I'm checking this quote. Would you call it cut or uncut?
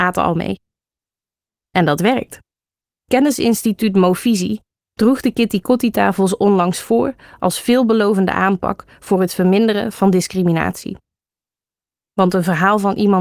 uncut